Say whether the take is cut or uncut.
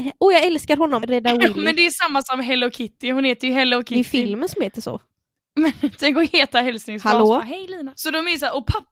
cut